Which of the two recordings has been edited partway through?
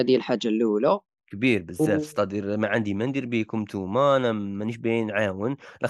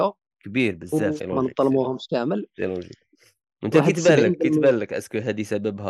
second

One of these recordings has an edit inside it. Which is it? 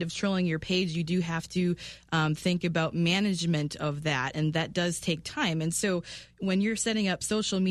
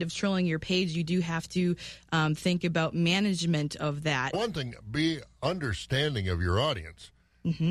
second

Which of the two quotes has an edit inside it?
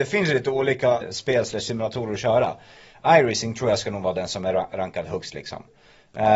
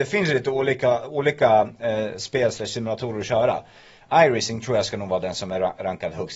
first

